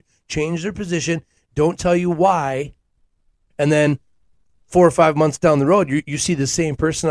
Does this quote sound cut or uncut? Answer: cut